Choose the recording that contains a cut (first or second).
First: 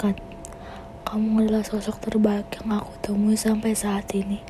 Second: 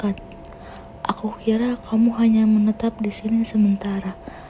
first